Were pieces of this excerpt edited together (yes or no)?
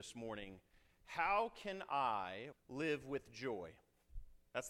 yes